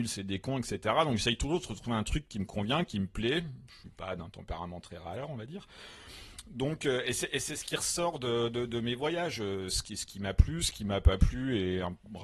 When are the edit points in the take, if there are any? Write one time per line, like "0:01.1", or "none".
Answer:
none